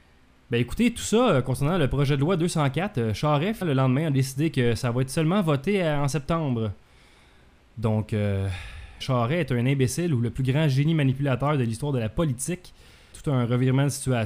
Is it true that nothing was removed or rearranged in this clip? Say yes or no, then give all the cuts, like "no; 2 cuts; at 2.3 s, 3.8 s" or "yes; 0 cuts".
no; 3 cuts; at 3.6 s, 9.0 s, 13.1 s